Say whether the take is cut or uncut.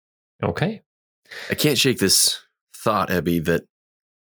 uncut